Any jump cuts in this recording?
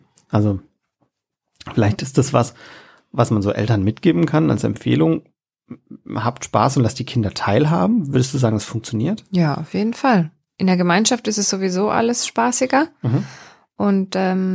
no; 0 cuts

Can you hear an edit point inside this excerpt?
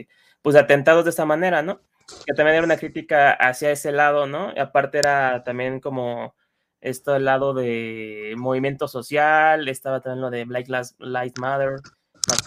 yes; 1 cut; at 2.2 s

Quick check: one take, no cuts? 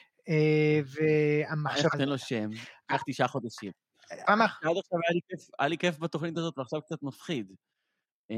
no; 2 cuts; at 1.9 s, 4.3 s

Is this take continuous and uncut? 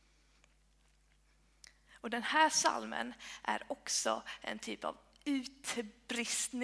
yes; 0 cuts

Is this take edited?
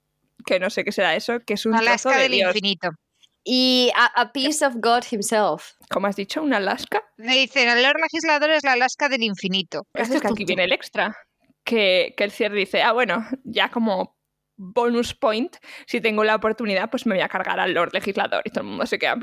yes; 1 cut; at 9.9 s

